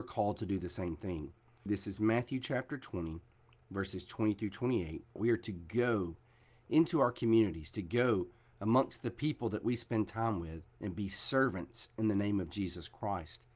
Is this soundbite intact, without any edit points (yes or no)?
no